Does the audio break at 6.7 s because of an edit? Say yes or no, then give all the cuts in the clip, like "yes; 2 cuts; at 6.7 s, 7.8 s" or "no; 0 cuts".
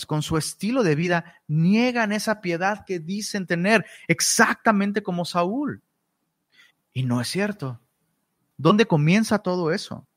yes; 2 cuts; at 6.7 s, 8.5 s